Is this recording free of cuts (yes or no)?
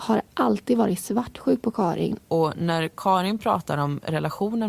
no